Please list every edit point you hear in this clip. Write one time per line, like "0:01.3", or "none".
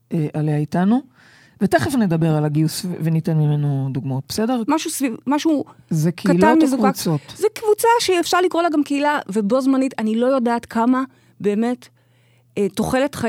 0:04.7